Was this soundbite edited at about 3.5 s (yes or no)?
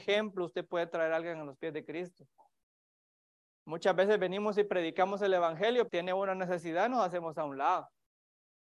yes